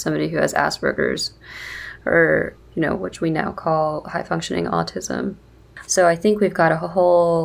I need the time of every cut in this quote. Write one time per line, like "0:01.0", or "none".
0:02.6
0:05.8

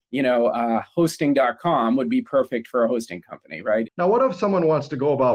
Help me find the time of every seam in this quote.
0:03.9

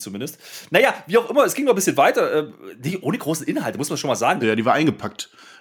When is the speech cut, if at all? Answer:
0:03.0
0:04.4

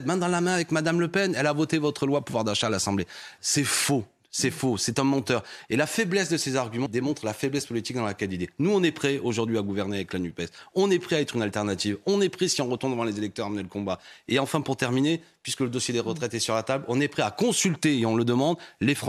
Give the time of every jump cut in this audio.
0:03.4
0:06.9

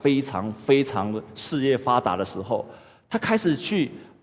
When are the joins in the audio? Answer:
none

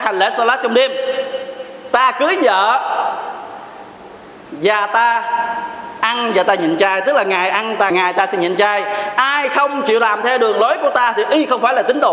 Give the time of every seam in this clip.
0:07.9

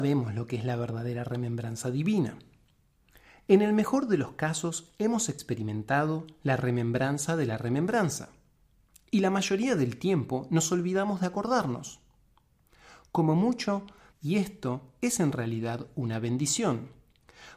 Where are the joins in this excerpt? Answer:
0:14.1

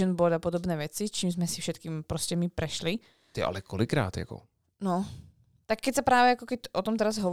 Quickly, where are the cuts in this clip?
none

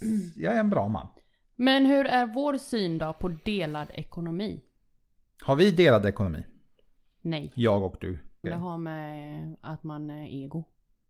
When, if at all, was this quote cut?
0:08.4

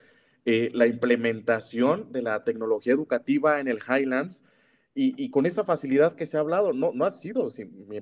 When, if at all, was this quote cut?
none

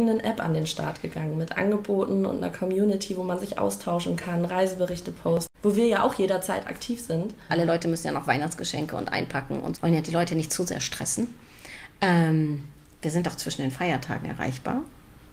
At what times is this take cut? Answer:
0:05.5
0:07.5
0:09.7

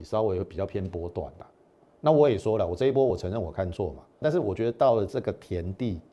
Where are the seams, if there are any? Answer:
0:04.2

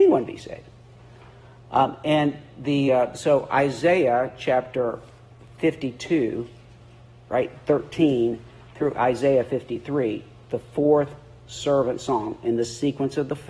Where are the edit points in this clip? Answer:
none

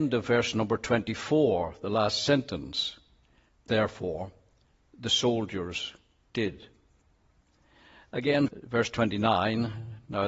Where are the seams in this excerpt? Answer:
0:03.7
0:08.5

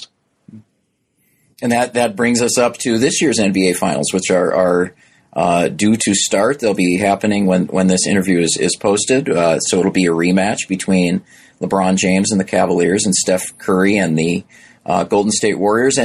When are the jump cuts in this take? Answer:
none

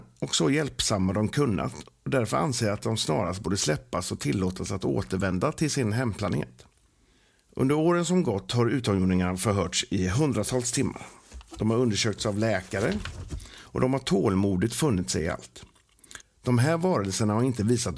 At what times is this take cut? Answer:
0:16.2

